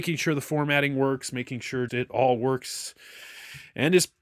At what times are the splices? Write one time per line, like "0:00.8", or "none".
0:01.9